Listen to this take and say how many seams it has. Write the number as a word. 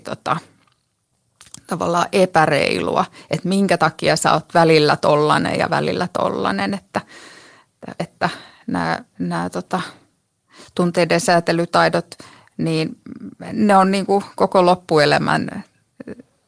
one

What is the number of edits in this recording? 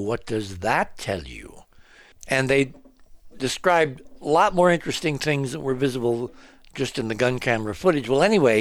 one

